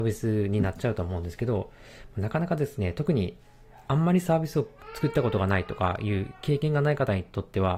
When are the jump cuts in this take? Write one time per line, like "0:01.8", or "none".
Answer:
none